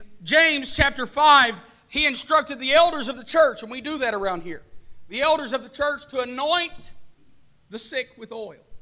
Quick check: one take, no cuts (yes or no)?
yes